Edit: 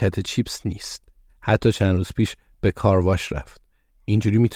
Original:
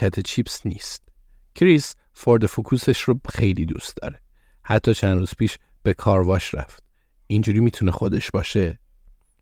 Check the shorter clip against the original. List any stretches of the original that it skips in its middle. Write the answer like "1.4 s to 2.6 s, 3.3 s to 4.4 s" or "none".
1.3 s to 4.5 s